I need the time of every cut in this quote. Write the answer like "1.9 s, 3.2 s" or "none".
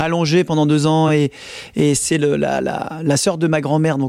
none

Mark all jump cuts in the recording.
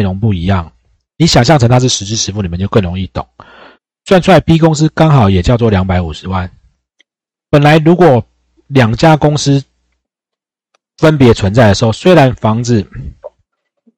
none

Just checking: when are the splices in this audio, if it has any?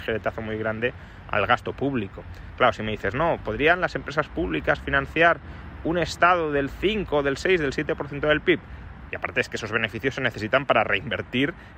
9.1 s

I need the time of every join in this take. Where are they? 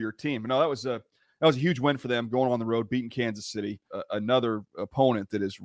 3.9 s

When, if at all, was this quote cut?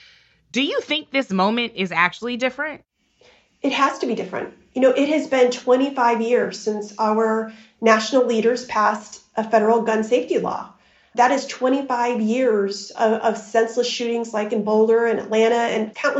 none

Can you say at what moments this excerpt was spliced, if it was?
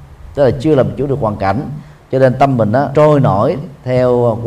2.9 s

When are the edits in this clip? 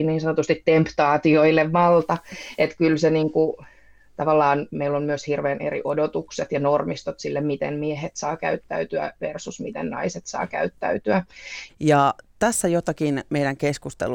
11.7 s

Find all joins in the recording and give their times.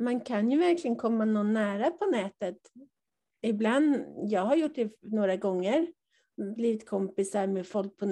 none

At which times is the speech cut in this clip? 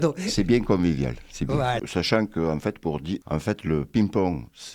1.8 s, 3.2 s

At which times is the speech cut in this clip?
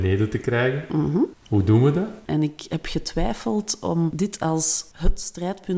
2.3 s

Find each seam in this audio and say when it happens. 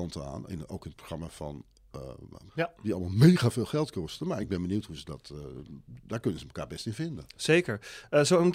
2.5 s

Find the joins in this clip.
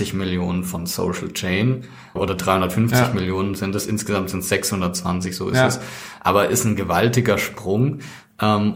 2.2 s

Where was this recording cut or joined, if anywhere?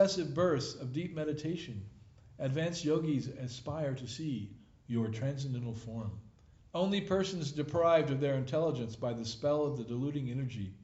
6.6 s

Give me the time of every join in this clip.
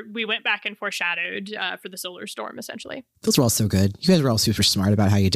3.1 s

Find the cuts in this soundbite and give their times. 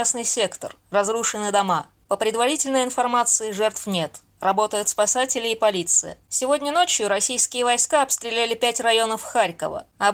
6.2 s

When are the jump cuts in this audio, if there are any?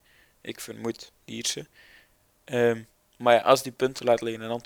1.2 s

